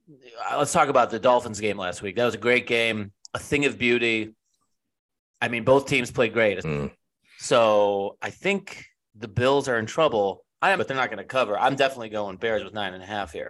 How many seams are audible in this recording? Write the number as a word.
two